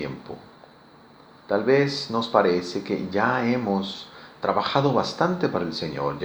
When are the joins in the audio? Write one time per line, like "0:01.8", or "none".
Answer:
0:01.4